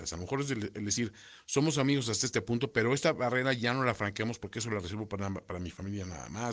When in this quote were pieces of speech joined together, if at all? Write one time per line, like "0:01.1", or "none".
none

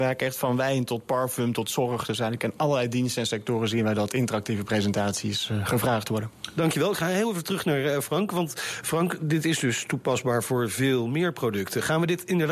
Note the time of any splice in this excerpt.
none

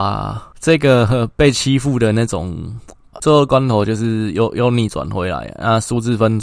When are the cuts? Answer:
0:03.1

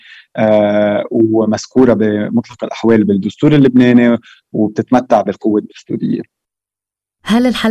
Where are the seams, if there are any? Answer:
none

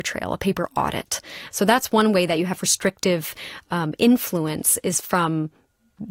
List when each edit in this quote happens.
0:01.5

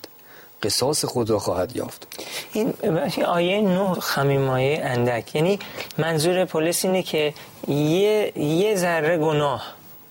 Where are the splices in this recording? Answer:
0:03.9

